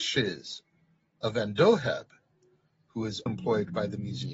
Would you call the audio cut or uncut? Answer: cut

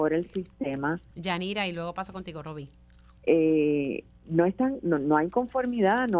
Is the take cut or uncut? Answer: cut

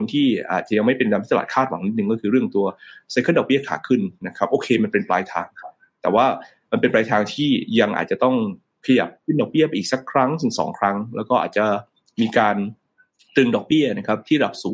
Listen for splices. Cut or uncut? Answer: uncut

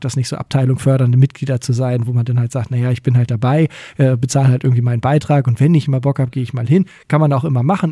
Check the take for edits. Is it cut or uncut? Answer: uncut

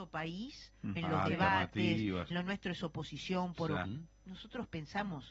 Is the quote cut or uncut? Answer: cut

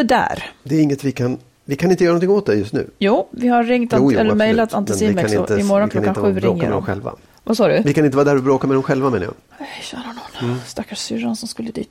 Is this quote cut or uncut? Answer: uncut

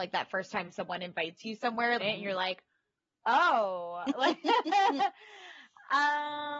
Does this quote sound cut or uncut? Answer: cut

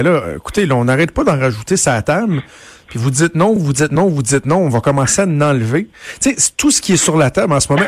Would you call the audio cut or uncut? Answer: uncut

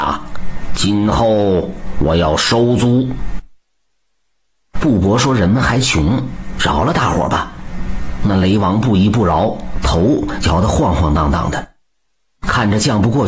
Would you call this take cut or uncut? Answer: uncut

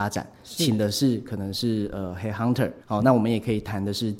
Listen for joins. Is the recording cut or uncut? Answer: cut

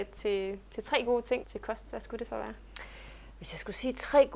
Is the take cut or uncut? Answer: cut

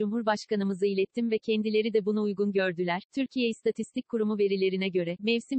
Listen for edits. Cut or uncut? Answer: cut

